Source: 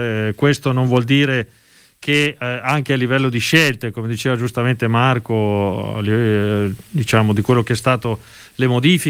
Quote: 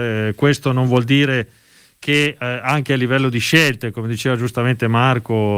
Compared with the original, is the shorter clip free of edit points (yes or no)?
yes